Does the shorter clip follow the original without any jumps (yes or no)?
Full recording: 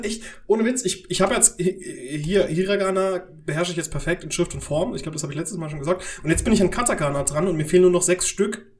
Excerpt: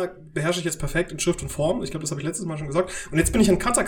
yes